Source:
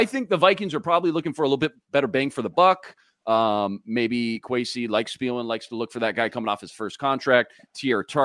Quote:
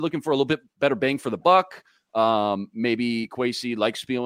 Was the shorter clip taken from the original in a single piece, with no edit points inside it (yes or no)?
yes